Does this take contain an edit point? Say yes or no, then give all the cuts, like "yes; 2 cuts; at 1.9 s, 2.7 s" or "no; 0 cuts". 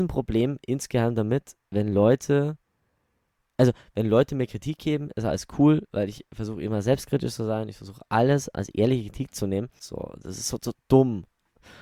yes; 2 cuts; at 8.5 s, 9.8 s